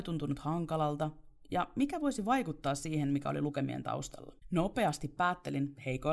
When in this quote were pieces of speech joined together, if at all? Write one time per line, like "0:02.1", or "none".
0:04.4